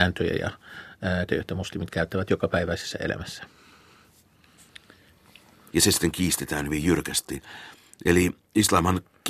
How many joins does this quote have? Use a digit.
2